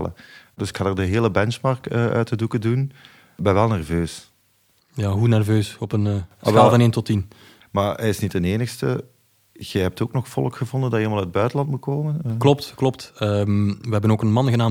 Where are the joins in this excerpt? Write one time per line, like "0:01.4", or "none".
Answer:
0:07.6